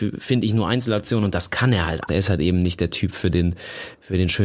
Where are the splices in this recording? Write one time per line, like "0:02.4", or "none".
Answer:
0:02.1